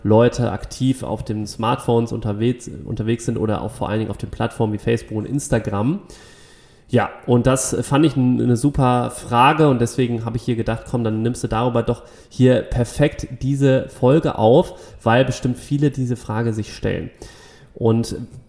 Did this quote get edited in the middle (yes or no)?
no